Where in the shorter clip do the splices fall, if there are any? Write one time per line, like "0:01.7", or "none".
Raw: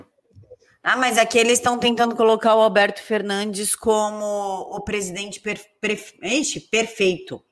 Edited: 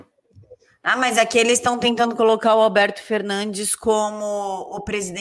none